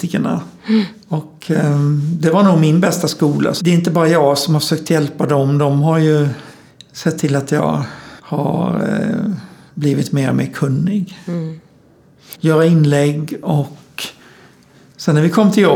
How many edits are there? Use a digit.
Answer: 2